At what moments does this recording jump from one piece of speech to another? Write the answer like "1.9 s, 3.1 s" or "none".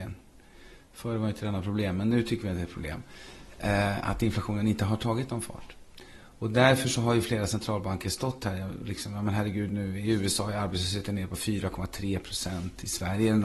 none